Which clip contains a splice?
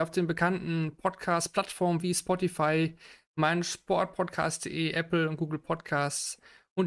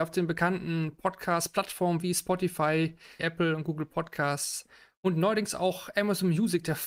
second; 1 cut; at 3.2 s

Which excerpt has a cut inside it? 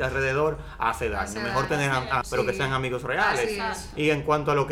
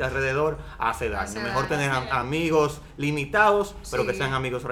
first; 1 cut; at 2.2 s

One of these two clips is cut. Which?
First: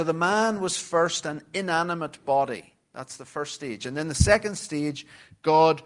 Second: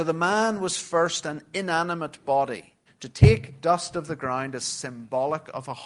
second; 1 cut; at 2.9 s

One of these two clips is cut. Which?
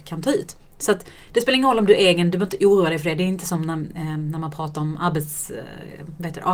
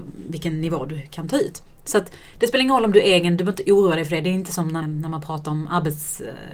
second; 1 cut; at 4.8 s

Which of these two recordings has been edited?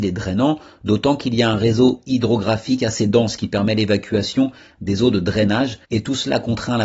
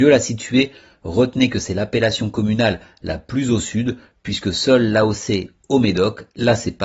first; 1 cut; at 5.8 s

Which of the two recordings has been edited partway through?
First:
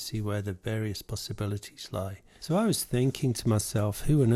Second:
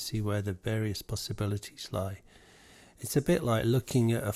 first; 1 cut; at 2.4 s

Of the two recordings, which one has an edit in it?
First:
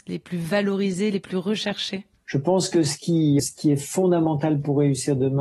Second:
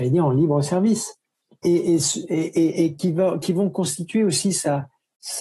first; 1 cut; at 3.4 s

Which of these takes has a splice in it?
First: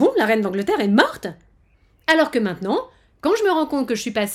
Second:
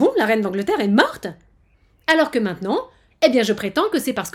second; 1 cut; at 3.1 s

